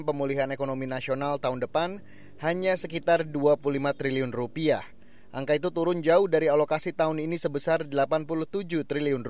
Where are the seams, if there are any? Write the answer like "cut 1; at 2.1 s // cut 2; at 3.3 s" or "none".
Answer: none

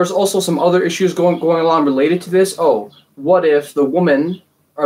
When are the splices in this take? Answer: none

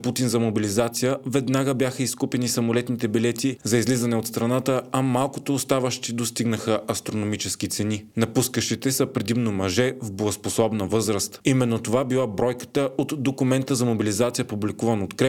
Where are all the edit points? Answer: cut 1; at 8.1 s // cut 2; at 11.4 s

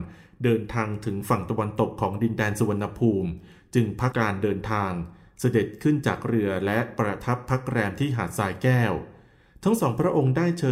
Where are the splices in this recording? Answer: cut 1; at 4.1 s

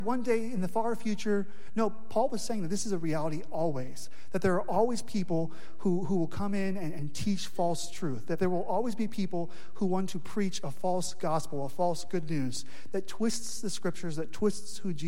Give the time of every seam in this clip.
none

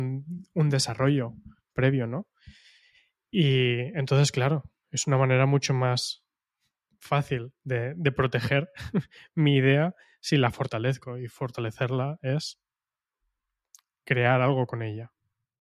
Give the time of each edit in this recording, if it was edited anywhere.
none

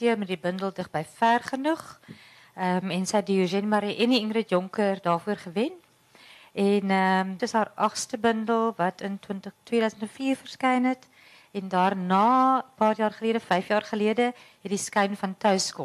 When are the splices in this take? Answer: cut 1; at 7.4 s

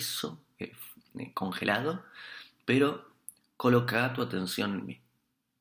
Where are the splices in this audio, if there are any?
none

